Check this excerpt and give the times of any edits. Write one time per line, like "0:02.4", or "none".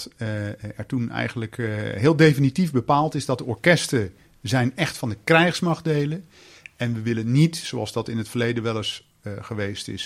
none